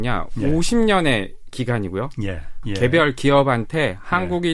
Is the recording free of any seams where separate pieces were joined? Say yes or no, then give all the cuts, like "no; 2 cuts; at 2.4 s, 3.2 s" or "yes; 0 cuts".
no; 1 cut; at 2.6 s